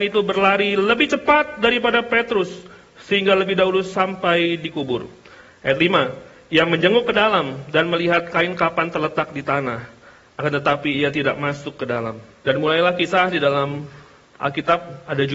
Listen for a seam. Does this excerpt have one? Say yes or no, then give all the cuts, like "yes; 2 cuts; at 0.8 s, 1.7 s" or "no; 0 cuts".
yes; 1 cut; at 12.4 s